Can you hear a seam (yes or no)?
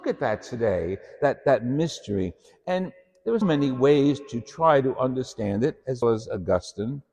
yes